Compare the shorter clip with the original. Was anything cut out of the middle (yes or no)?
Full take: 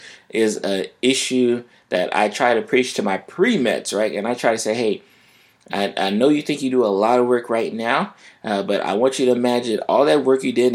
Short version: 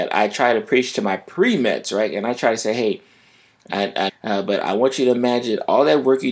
yes